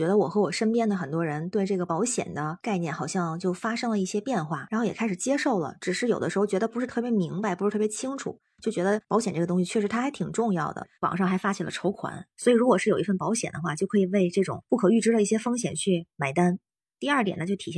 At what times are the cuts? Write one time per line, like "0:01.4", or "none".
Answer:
0:11.0
0:12.3

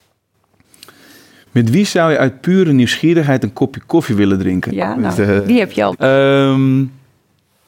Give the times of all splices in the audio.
0:04.7
0:05.9

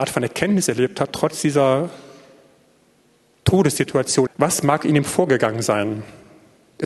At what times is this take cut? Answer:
0:04.3

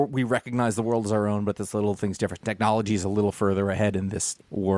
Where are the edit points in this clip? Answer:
none

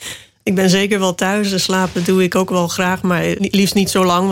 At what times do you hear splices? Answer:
0:03.4

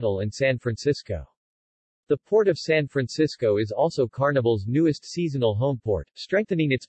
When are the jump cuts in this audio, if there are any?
none

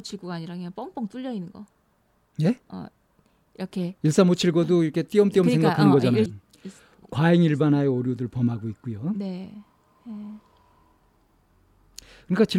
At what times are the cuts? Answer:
0:02.6
0:06.3

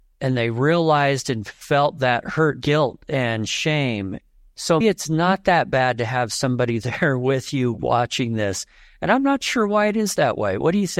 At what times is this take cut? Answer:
0:02.6
0:04.8

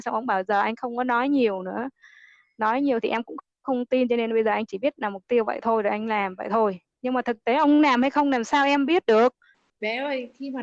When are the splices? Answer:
none

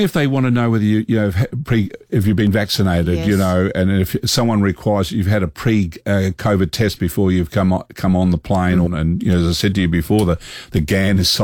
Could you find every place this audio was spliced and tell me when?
0:08.9

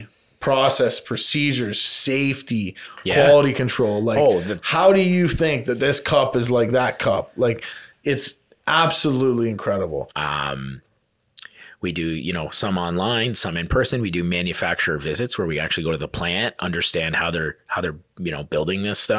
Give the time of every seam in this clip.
0:10.1

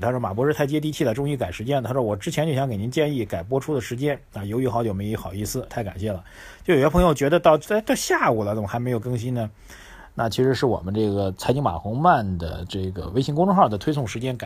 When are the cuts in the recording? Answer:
0:05.7

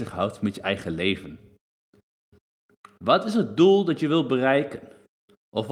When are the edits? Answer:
none

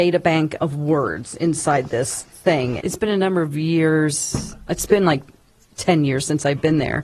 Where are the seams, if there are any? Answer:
0:02.8

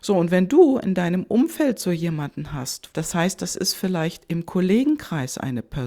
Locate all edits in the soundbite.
0:02.9

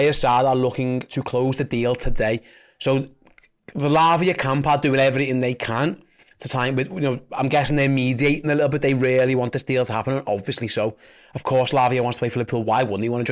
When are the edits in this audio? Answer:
none

